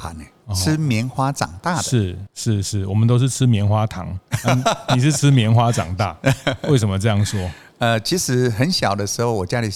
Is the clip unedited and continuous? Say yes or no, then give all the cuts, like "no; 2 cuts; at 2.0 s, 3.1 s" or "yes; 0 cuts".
yes; 0 cuts